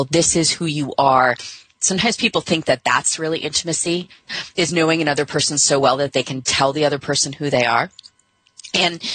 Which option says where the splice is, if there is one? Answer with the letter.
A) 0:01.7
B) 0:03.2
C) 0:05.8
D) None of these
A